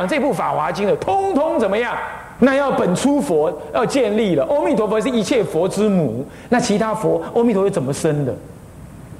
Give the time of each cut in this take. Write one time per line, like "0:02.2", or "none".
0:02.4
0:06.5